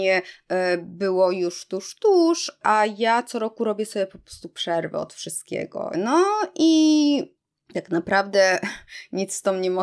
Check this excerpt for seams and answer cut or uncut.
cut